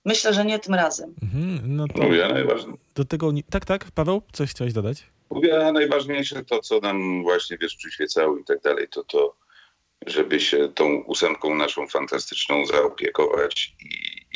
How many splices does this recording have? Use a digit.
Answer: 0